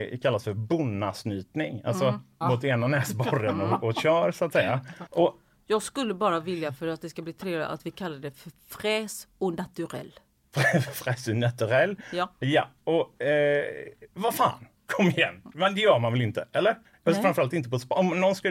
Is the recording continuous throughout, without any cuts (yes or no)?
no